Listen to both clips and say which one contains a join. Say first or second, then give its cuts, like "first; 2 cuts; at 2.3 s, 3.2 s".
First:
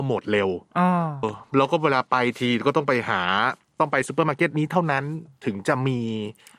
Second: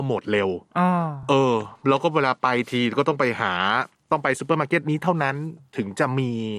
first; 1 cut; at 1.2 s